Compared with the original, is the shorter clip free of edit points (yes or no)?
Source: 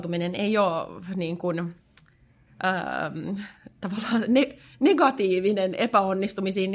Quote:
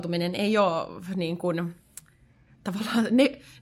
no